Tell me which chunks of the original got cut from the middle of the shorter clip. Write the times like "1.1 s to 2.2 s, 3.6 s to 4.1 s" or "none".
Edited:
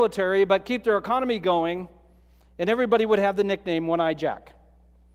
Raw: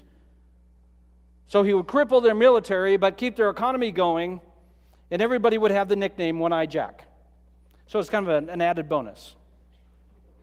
none

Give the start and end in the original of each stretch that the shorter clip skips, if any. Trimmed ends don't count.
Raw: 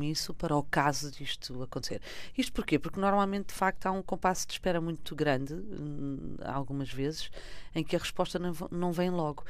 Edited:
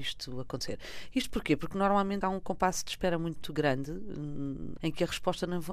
3.4 s to 3.8 s, 6.4 s to 7.7 s

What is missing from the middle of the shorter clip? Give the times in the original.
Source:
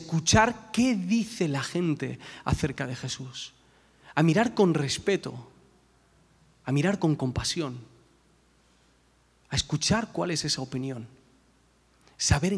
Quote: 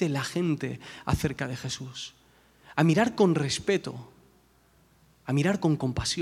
none

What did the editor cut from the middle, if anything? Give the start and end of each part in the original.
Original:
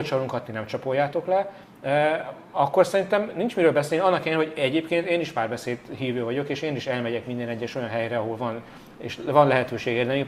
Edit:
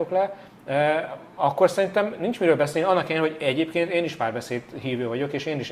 none

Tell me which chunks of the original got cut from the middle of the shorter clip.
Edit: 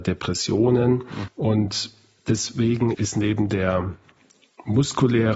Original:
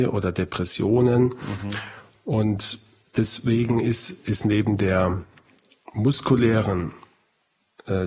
1.6 s to 2.2 s, 3.8 s to 4.2 s

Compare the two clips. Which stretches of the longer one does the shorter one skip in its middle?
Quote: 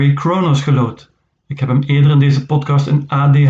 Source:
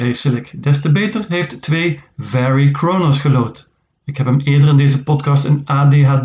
none

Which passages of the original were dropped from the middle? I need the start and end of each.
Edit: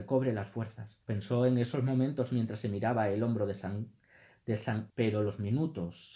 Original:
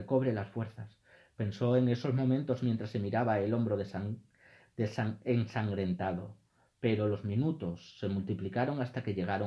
1.0 s to 1.3 s, 5.2 s to 6.8 s

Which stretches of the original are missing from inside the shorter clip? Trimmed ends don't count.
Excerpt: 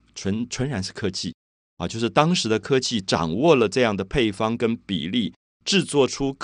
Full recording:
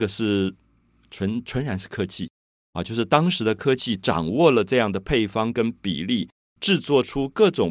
none

